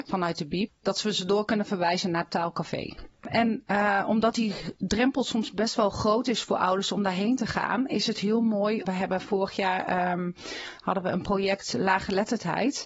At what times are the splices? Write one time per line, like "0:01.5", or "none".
0:08.9

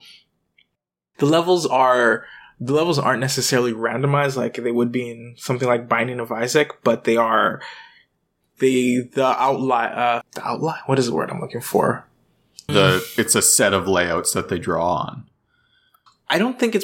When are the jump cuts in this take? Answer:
0:10.2
0:12.7

